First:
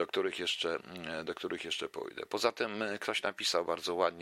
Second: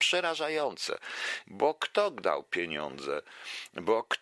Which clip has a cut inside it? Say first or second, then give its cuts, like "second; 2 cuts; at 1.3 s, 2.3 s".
second; 1 cut; at 1.4 s